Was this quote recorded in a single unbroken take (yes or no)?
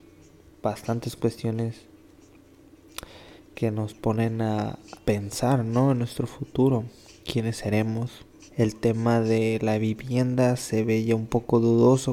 no